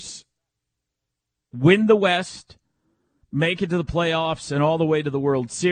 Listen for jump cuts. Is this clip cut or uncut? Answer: uncut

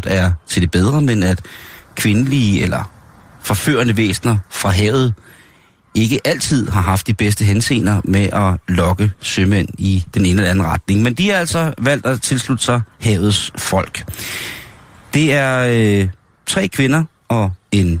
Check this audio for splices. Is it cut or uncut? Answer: uncut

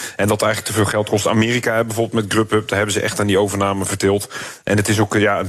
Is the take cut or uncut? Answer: uncut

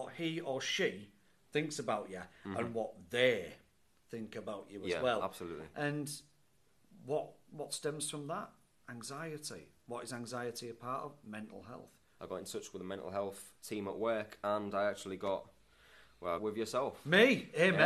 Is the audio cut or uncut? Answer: cut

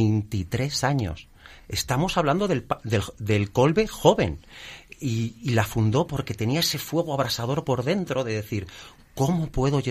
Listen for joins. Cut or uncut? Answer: uncut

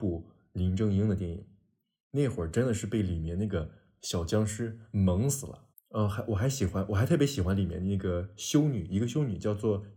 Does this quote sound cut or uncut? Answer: cut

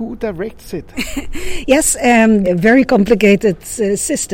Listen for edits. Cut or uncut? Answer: cut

